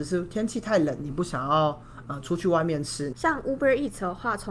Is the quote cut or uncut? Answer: cut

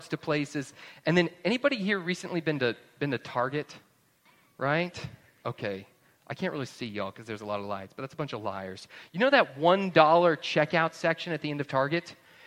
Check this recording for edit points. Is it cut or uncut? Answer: uncut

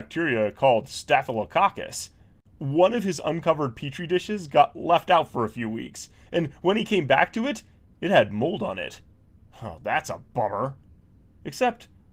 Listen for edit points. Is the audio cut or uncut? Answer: uncut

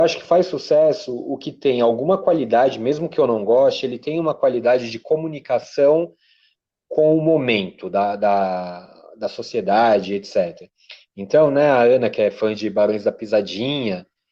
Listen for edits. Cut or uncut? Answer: uncut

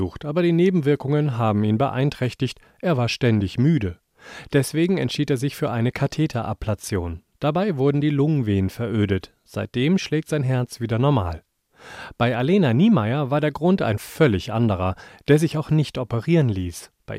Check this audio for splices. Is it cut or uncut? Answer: uncut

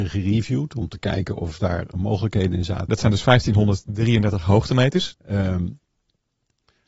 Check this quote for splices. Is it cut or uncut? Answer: cut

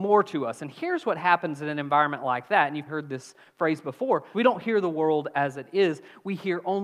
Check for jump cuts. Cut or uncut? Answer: cut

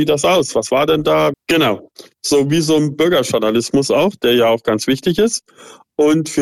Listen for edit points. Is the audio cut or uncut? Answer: cut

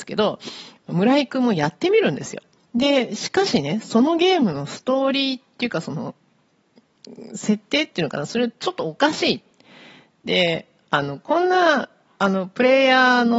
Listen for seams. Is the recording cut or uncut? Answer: cut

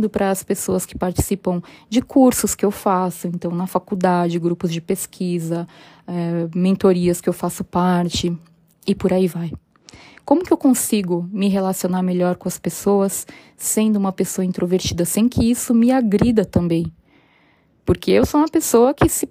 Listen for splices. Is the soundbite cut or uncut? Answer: uncut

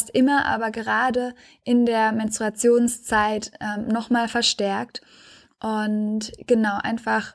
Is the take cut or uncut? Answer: uncut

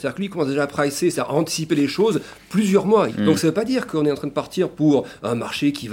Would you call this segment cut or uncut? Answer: cut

